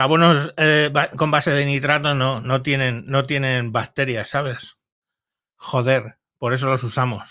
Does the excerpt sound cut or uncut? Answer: uncut